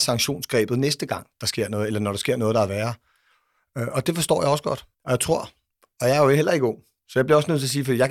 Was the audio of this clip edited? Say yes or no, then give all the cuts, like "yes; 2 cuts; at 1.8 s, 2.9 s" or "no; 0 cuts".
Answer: yes; 1 cut; at 4.9 s